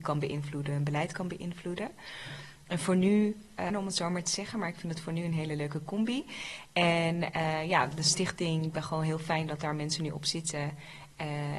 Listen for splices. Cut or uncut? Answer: cut